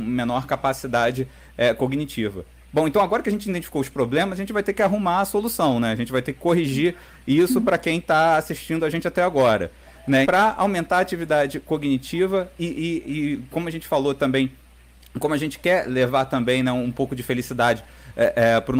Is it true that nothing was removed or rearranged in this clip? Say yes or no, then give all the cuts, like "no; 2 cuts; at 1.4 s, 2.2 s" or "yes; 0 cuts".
no; 1 cut; at 10.2 s